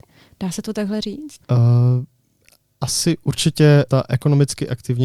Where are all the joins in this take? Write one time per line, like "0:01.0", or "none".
0:01.4
0:03.9